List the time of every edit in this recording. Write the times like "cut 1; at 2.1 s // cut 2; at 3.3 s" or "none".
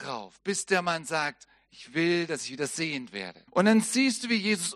cut 1; at 3.5 s